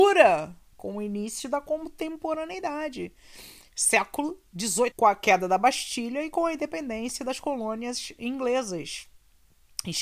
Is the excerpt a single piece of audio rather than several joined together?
no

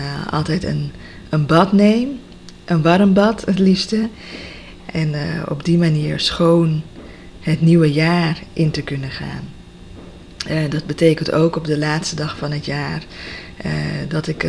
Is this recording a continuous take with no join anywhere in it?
no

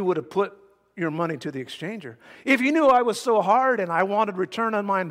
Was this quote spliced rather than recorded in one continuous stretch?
no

